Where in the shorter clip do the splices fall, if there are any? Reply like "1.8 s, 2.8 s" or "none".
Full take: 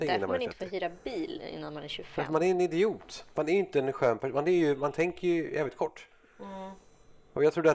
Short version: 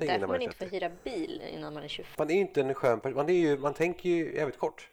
2.1 s

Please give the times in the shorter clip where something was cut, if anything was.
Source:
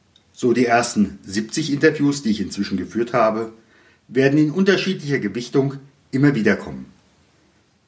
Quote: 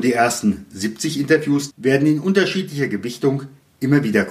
1.7 s

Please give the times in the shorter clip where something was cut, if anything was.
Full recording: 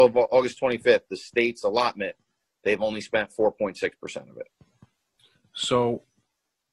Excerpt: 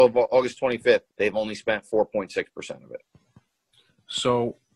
1.1 s

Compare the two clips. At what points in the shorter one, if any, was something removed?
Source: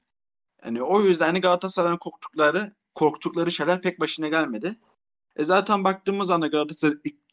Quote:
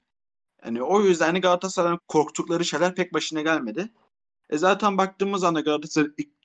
2.0 s

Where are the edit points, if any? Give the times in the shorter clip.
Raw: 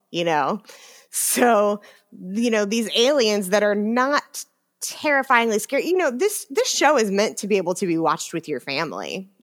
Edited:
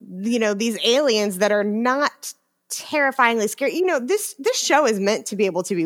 none

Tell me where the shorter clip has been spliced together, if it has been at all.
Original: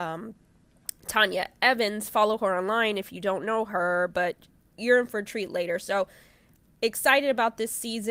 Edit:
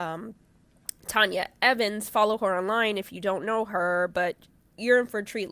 none

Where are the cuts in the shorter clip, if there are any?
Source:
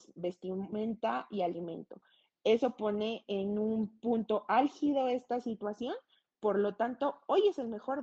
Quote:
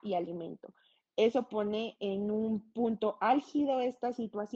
none

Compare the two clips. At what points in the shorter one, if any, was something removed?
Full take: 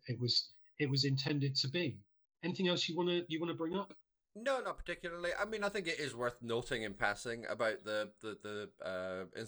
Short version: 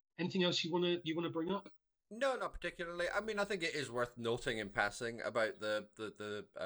none

